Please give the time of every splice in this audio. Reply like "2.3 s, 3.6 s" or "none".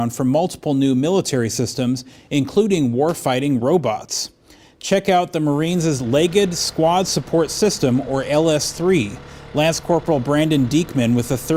none